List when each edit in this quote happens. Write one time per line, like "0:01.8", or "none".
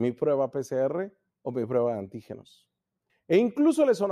0:03.1